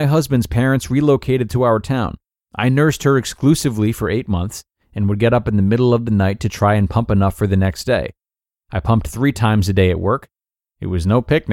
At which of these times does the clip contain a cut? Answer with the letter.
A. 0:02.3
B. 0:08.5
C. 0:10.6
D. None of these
A